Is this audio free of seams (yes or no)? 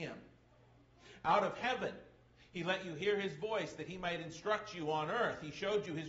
yes